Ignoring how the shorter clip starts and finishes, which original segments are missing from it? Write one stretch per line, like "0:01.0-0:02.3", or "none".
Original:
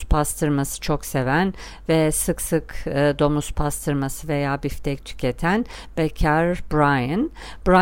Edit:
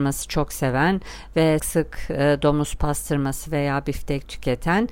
0:02.1-0:02.4